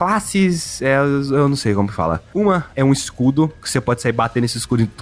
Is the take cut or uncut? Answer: uncut